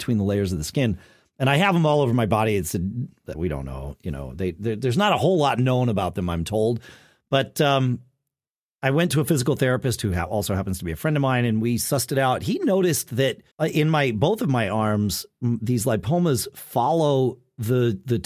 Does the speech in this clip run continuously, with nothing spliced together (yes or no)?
no